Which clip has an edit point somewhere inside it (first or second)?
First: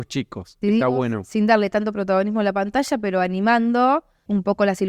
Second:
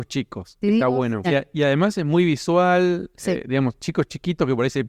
second